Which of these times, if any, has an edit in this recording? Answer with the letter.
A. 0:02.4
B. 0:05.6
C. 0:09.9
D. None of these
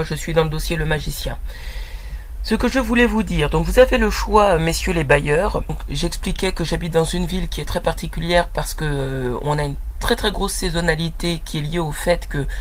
D